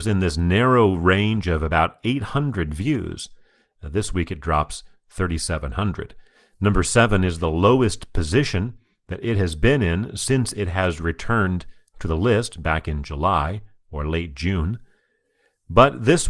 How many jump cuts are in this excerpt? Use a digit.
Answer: 0